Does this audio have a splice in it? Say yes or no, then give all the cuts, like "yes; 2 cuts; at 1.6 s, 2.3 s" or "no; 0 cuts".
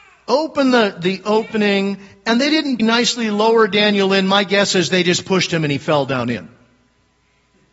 yes; 1 cut; at 2.8 s